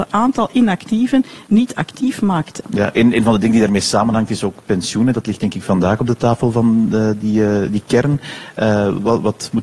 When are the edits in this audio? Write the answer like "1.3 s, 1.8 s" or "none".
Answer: 2.6 s